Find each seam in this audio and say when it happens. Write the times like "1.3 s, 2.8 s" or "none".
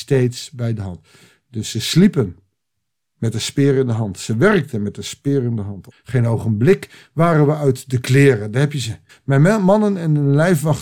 5.9 s, 9.1 s